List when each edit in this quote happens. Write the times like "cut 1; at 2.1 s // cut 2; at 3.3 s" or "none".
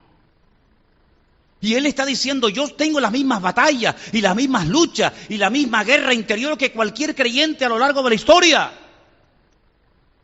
cut 1; at 1.6 s